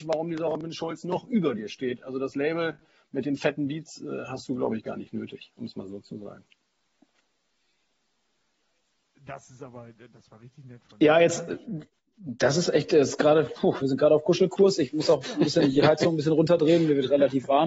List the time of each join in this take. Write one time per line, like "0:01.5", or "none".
none